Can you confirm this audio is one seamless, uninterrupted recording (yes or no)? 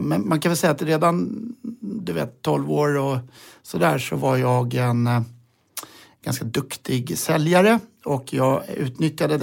yes